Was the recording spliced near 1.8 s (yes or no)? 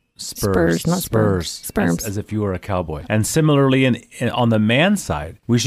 no